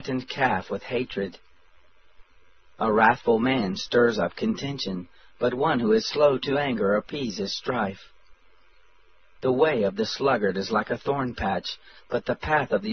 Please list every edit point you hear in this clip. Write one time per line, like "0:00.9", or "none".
none

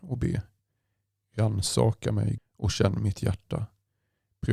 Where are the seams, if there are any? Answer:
0:02.4

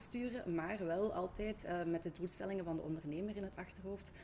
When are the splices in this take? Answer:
none

